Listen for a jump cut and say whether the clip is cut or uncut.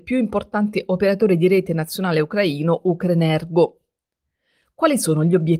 uncut